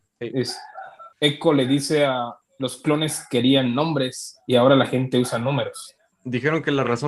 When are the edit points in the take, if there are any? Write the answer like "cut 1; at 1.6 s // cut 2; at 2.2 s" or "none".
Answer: cut 1; at 1.1 s // cut 2; at 2.4 s // cut 3; at 6.1 s